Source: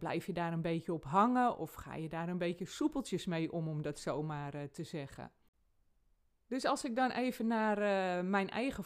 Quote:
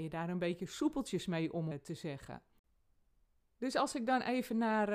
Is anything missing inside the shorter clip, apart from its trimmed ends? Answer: yes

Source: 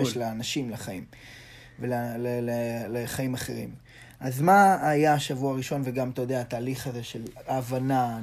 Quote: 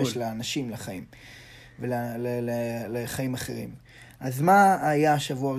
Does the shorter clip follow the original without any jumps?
yes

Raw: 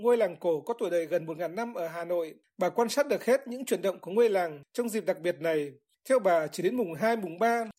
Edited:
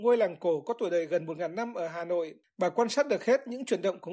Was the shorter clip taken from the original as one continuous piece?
yes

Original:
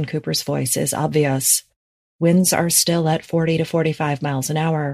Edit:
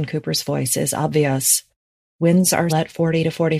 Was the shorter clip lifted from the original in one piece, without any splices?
no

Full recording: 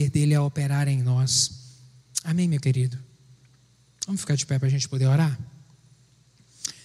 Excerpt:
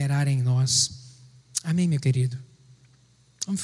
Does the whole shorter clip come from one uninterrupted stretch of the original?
yes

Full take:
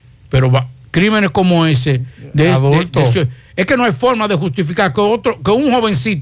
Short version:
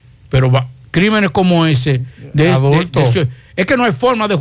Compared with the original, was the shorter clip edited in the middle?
no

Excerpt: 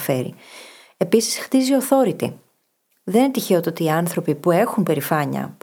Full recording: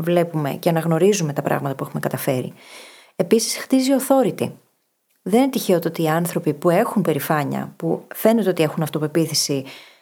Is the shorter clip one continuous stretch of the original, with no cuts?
yes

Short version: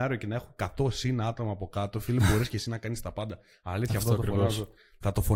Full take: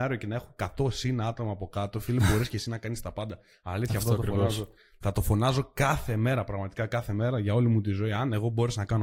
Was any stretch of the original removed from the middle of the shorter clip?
no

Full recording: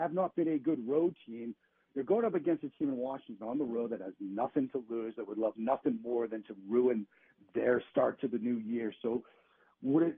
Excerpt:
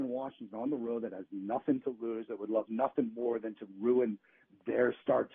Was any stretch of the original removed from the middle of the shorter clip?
no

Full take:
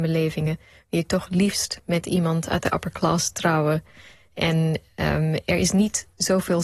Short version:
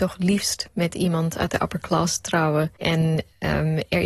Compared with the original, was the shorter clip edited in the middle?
yes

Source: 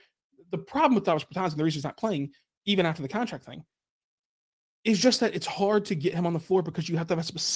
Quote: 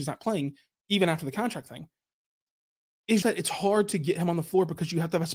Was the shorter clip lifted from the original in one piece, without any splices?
no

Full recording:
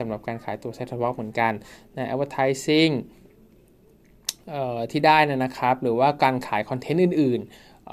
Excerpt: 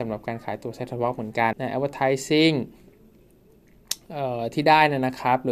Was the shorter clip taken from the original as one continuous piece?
no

